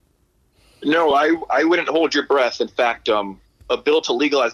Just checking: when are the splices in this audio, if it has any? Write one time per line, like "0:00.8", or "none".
none